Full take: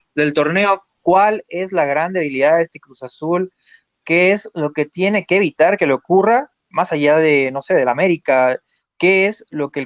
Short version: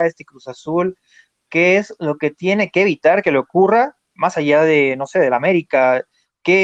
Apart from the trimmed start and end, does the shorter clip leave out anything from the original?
no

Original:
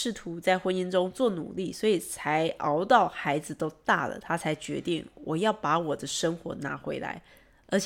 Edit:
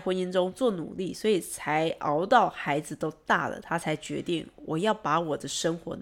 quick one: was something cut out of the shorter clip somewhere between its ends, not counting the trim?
no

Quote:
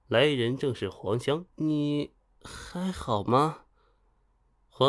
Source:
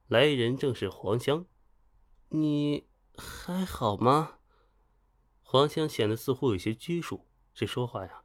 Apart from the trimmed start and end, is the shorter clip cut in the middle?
yes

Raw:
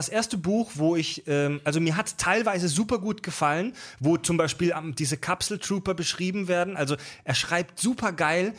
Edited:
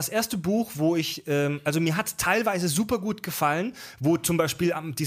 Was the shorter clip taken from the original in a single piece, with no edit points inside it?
yes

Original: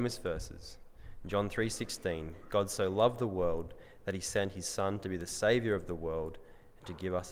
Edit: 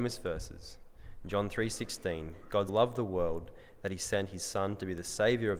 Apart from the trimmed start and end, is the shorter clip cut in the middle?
yes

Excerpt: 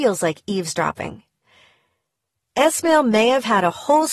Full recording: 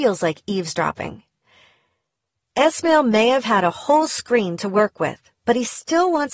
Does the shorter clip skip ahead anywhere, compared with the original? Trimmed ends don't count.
no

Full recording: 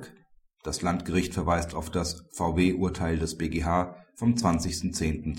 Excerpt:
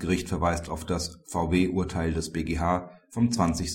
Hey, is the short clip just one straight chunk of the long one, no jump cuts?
yes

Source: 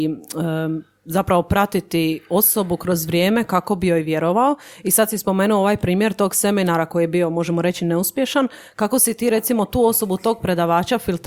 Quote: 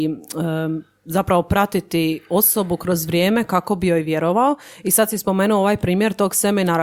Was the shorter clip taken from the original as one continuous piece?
yes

